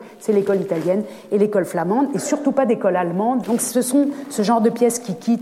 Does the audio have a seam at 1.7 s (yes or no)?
no